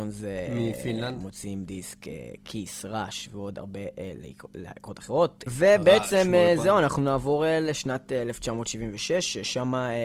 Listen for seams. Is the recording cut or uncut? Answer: cut